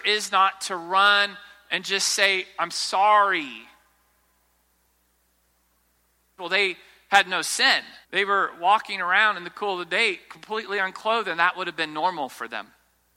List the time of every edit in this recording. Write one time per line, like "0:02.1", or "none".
0:06.4
0:08.0